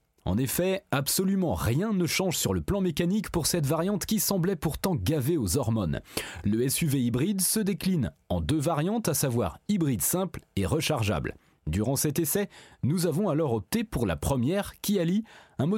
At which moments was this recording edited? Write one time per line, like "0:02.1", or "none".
none